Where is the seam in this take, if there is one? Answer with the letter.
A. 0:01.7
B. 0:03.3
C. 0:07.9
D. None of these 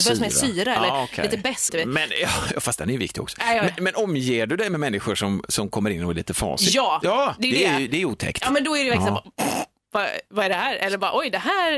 A